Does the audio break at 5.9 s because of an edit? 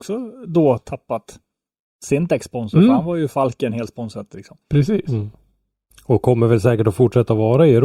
no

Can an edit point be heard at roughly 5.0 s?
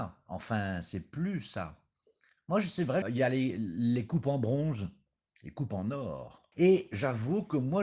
no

